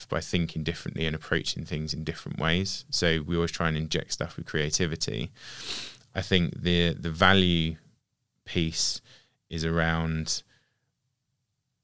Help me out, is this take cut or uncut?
uncut